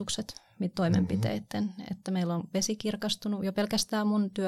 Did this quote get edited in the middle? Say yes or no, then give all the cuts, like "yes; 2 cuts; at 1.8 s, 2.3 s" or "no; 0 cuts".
no; 0 cuts